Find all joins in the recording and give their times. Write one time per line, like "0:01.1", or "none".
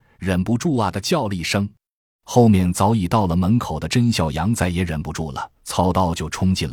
0:05.6